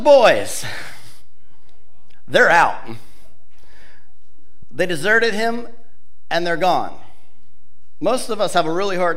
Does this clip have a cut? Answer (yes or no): no